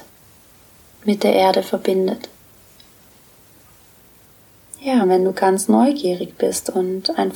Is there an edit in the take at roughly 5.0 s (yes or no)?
yes